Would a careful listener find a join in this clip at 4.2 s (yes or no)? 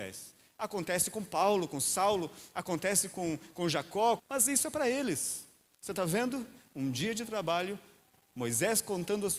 yes